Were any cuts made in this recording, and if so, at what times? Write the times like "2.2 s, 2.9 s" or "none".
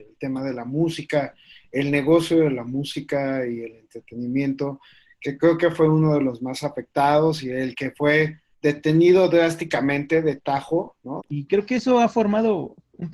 8.5 s, 11.2 s